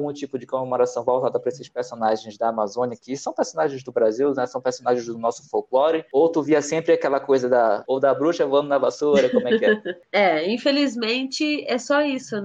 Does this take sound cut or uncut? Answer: cut